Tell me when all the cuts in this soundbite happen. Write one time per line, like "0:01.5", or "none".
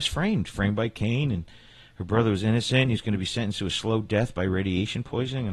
none